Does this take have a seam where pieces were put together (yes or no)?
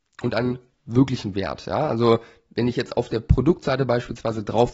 no